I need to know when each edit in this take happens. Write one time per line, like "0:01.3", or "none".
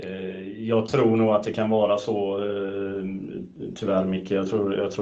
none